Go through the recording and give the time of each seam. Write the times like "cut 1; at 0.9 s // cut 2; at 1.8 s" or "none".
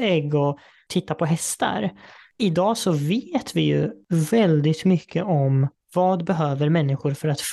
none